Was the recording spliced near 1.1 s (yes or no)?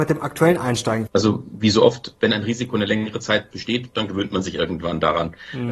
yes